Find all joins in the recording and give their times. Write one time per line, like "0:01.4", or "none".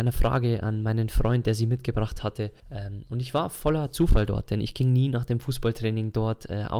0:02.6